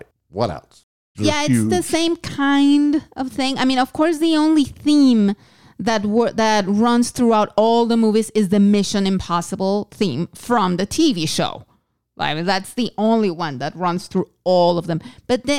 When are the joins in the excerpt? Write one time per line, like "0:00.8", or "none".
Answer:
0:01.1